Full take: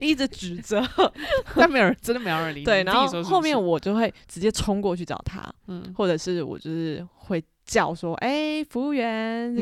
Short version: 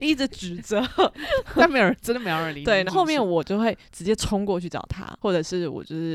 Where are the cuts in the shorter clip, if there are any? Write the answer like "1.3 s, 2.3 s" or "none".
2.9 s, 5.2 s